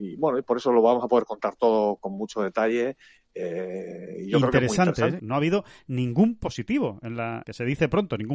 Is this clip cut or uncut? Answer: cut